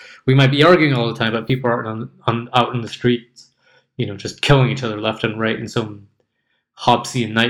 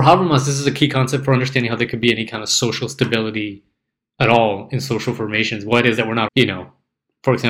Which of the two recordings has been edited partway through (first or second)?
second